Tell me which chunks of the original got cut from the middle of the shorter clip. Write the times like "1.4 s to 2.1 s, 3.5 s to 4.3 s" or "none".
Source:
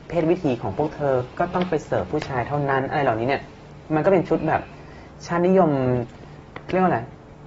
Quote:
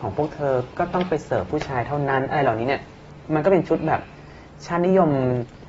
none